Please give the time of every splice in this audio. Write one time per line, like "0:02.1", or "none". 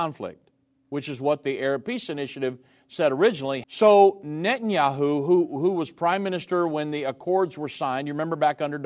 0:03.6